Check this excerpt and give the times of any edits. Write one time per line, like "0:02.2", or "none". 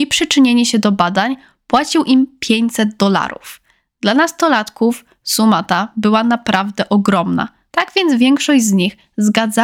0:07.7